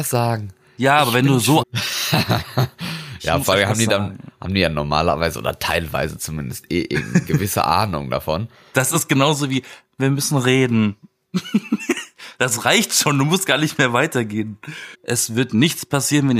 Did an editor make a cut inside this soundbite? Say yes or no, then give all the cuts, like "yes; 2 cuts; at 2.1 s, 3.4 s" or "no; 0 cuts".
yes; 2 cuts; at 1.6 s, 14.9 s